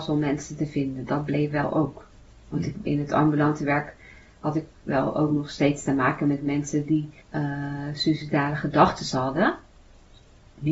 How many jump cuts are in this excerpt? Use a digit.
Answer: 2